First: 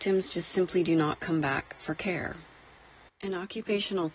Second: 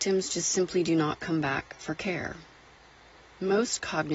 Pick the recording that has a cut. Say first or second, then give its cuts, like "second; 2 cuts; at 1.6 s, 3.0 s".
first; 1 cut; at 3.1 s